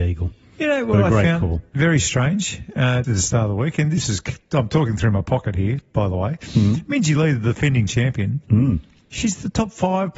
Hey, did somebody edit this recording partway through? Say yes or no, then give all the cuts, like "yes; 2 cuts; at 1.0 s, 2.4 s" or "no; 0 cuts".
yes; 1 cut; at 3.0 s